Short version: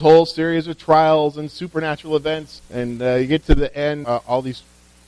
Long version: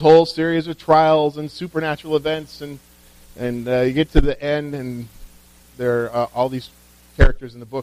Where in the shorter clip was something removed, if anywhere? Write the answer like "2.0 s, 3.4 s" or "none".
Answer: 2.6 s, 4.0 s

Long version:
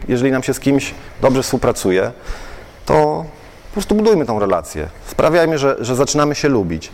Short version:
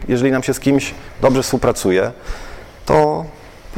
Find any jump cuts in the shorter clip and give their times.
none

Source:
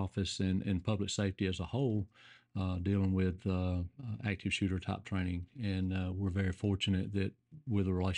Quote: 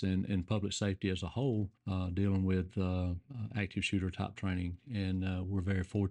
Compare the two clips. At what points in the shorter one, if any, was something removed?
1.8 s

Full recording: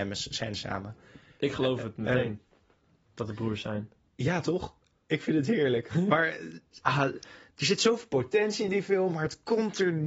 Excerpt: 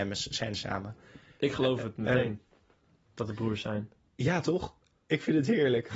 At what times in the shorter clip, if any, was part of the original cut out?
none

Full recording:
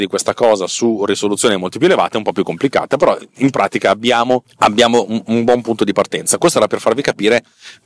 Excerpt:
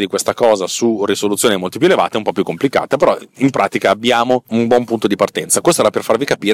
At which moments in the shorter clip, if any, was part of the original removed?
4.5 s

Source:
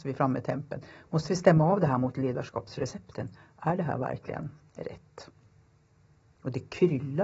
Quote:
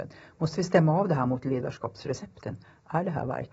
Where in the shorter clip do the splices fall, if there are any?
none

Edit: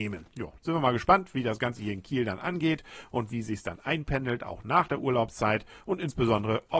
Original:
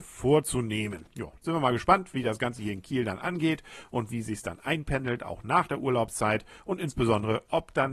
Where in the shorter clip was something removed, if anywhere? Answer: none

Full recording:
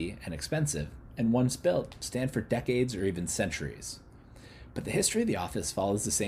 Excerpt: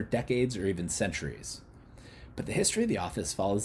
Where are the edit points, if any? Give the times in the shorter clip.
none

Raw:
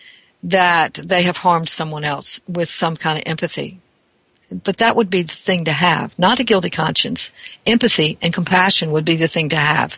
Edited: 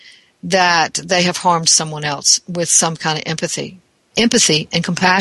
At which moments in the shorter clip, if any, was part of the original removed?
4.1 s

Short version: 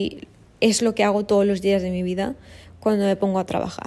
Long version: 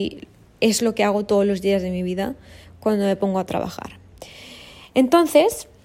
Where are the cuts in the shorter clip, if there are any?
none

